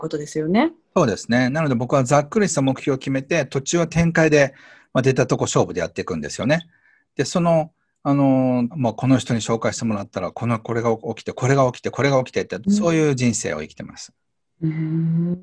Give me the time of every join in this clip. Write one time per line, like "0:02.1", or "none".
0:08.7
0:12.6